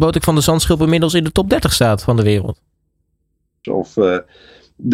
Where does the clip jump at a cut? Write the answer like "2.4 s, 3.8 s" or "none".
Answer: 3.6 s

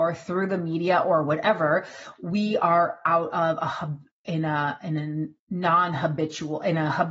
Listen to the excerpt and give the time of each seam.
5.4 s

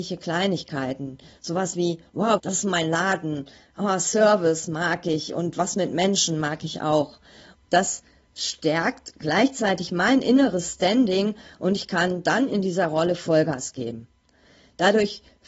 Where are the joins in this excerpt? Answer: 2.4 s, 7.5 s

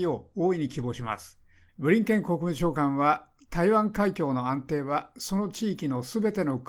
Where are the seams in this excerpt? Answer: 1.7 s

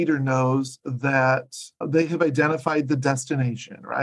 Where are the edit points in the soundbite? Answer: 1.8 s

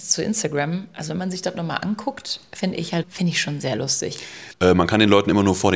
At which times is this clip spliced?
3.0 s, 4.5 s

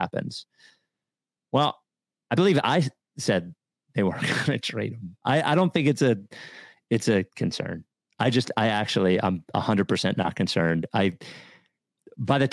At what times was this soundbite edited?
none

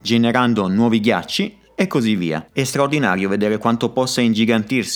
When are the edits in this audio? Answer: 2.5 s

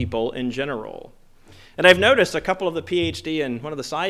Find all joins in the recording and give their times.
none

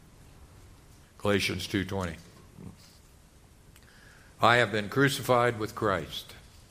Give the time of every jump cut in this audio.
1.0 s

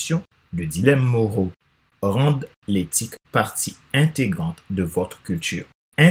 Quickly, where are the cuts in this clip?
1.9 s, 3.2 s

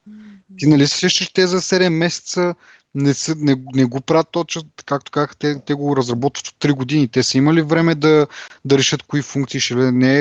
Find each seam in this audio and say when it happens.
none

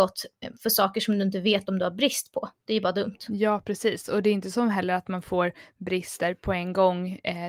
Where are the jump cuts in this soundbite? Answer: none

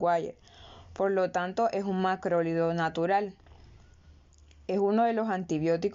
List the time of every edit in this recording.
none

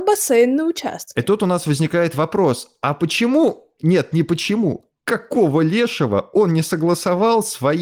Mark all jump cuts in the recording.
none

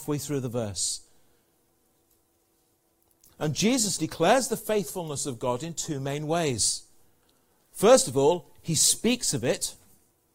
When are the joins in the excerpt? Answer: 4.0 s

